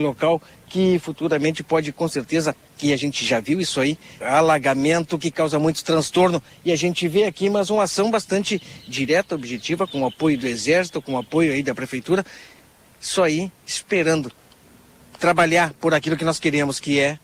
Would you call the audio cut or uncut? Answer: cut